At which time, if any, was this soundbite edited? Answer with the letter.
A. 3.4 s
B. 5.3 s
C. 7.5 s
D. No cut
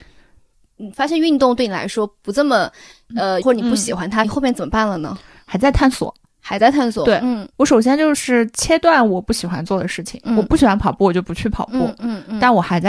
A